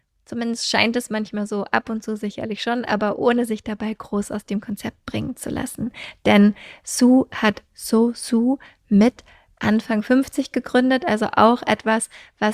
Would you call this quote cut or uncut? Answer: uncut